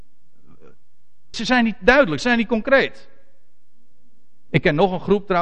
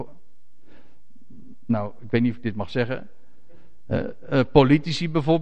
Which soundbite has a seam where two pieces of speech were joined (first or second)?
first